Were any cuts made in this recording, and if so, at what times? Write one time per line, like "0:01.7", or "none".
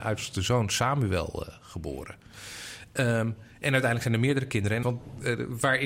0:04.8